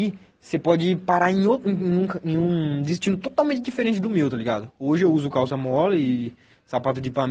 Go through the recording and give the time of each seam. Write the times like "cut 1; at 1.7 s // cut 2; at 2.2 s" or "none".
none